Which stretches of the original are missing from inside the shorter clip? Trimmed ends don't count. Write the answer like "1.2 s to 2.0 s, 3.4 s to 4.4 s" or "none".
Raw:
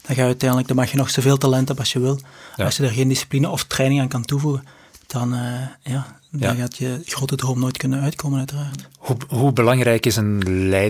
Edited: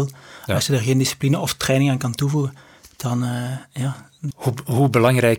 6.4 s to 8.9 s

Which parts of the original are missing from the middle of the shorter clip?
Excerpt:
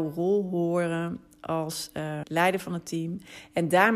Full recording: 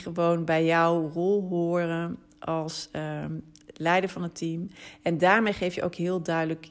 3.2 s to 3.7 s

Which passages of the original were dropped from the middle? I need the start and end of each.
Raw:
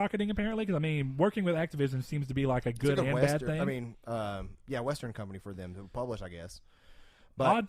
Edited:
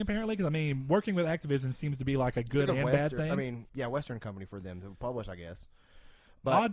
4.0 s to 4.6 s

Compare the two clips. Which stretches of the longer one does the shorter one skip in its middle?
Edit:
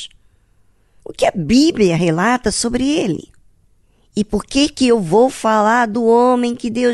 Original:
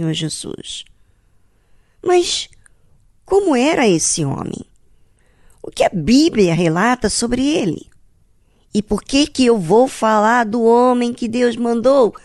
1.7 s to 5.6 s

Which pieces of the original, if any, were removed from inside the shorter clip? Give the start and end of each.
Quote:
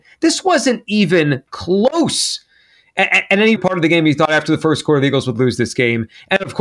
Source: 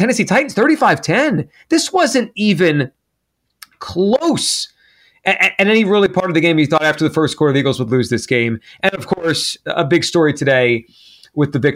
3.0 s to 3.8 s, 5.8 s to 6.1 s

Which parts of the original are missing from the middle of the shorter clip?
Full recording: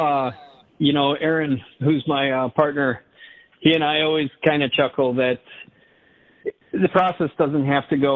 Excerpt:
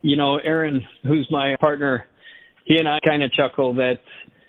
2.3 s to 2.5 s, 3.9 s to 4.4 s

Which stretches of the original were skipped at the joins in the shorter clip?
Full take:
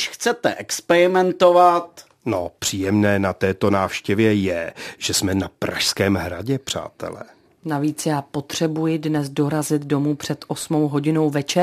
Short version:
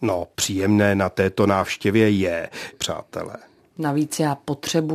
5.0 s to 6.6 s

